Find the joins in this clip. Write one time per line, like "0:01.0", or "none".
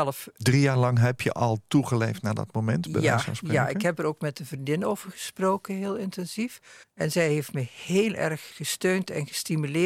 0:06.8
0:08.5